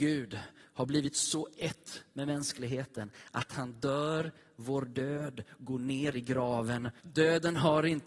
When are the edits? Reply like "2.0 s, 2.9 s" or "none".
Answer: 7.0 s